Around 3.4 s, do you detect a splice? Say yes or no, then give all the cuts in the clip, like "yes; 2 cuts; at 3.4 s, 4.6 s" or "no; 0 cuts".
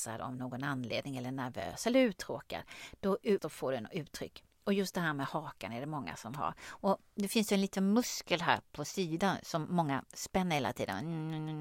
yes; 1 cut; at 3.4 s